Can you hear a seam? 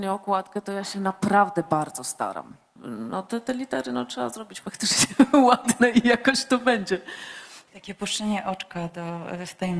yes; 2 cuts; at 2.8 s, 7.7 s

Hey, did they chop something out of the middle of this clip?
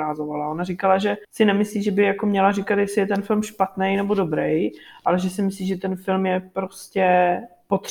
yes; 1 cut; at 1.2 s

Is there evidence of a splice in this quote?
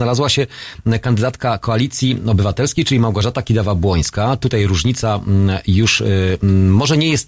no; 0 cuts

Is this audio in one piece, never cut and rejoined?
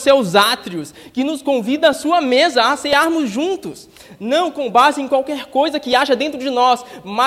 yes; 0 cuts

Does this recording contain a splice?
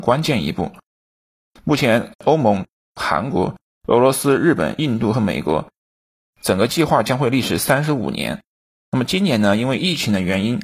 yes; 1 cut; at 2.1 s

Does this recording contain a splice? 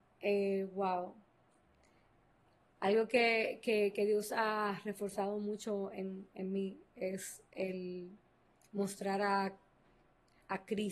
no; 0 cuts

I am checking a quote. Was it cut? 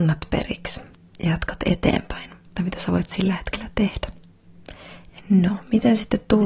yes; 2 cuts; at 2.6 s, 5.2 s

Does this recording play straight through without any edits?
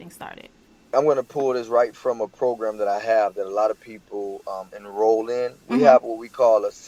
yes; 0 cuts

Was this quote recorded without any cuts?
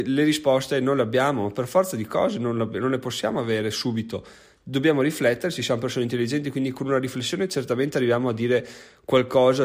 yes; 0 cuts

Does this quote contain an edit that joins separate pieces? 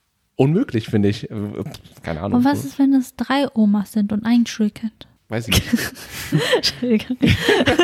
no; 0 cuts

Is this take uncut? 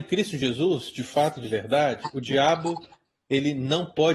yes; 0 cuts

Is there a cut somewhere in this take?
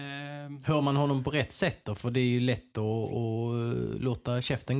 no; 0 cuts

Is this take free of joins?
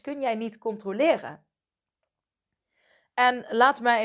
yes; 0 cuts

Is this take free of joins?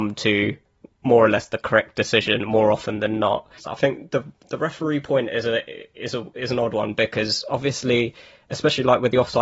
no; 1 cut; at 3.6 s

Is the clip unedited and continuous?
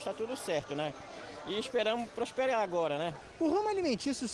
yes; 0 cuts

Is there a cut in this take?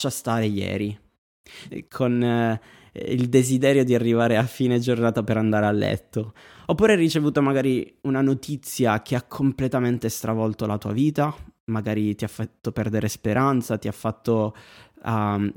yes; 1 cut; at 1.7 s

